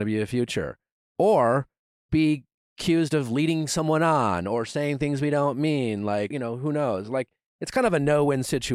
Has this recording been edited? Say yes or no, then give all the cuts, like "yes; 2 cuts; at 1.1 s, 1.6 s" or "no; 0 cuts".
yes; 1 cut; at 6.3 s